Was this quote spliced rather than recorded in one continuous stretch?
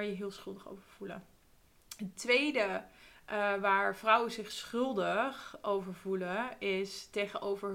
no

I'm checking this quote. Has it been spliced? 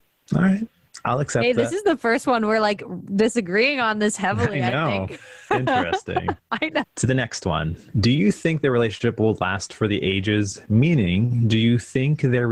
yes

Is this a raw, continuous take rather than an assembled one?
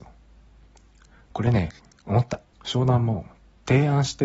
no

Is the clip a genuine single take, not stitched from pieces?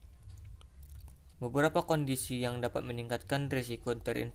no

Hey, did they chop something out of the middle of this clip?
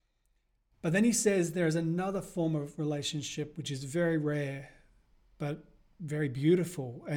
no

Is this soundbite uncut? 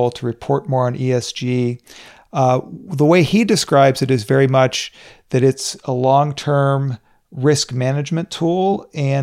yes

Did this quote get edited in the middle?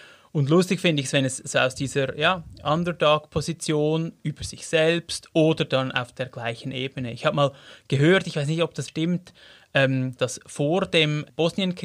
yes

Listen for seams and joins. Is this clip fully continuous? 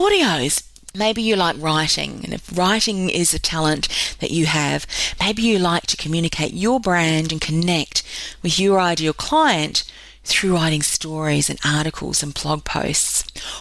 no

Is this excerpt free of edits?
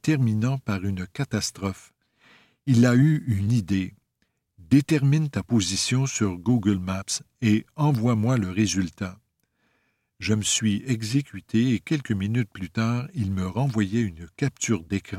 yes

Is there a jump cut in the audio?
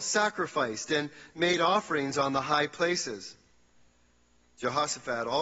no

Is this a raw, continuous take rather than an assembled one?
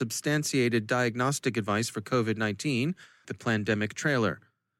no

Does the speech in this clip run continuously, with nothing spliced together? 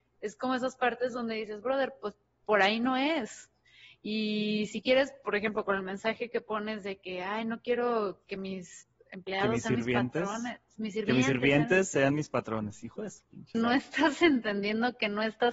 no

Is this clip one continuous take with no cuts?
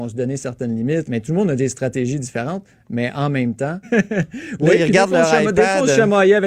no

